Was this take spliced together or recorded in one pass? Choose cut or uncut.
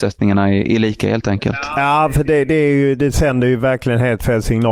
uncut